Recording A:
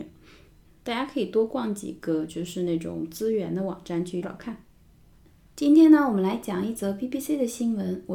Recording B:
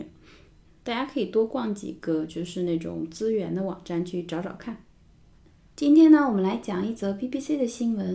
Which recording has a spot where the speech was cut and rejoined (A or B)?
A